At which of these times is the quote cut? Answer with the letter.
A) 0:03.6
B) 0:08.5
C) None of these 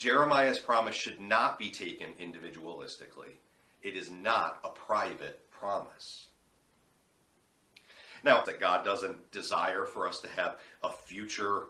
B